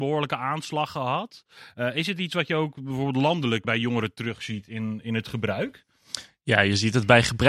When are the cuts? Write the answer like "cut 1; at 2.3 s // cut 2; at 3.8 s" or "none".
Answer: cut 1; at 3.6 s

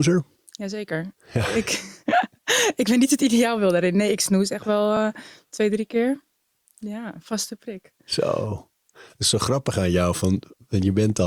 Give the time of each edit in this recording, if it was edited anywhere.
none

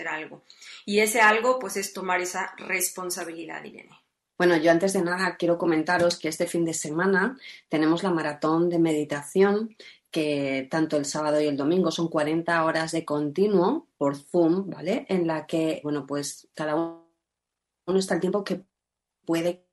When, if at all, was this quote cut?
cut 1; at 4.4 s // cut 2; at 15.8 s

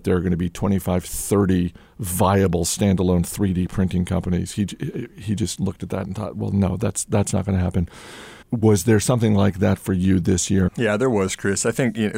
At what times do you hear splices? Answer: cut 1; at 8.4 s // cut 2; at 10.7 s

